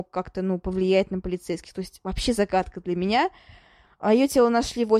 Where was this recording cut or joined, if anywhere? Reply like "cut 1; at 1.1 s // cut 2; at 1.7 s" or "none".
cut 1; at 3.9 s